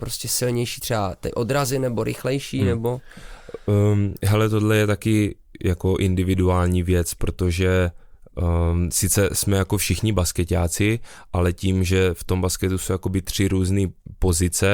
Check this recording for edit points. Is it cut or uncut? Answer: uncut